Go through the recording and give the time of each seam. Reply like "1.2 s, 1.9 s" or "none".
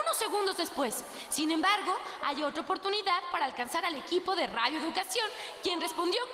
none